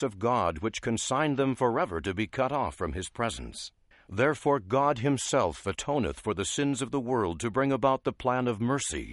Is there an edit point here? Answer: yes; 1 cut; at 3.9 s

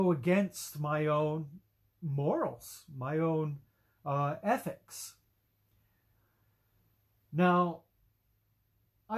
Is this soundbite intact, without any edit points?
yes; 0 cuts

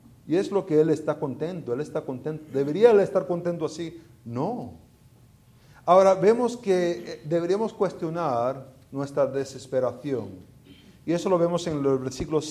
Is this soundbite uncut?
yes; 0 cuts

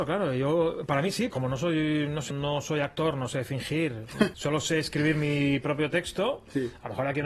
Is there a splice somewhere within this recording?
yes; 3 cuts; at 1.3 s, 2.3 s, 4.3 s

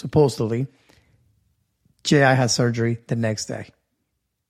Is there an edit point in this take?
no; 0 cuts

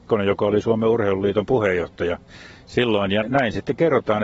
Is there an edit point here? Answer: yes; 1 cut; at 3.2 s

